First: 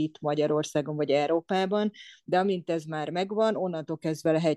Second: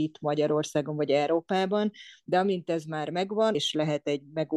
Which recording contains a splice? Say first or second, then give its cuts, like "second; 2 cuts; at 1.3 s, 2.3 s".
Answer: second; 1 cut; at 3.5 s